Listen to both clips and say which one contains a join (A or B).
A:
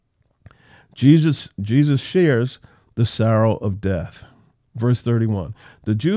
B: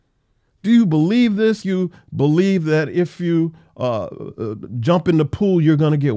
B